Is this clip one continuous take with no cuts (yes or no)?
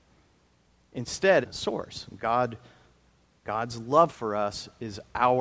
no